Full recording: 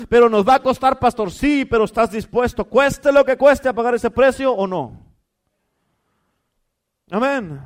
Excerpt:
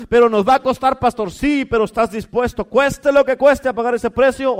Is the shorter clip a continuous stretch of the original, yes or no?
yes